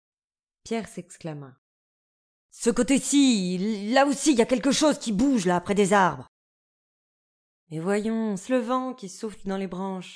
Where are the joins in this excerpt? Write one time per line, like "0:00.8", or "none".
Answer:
0:08.5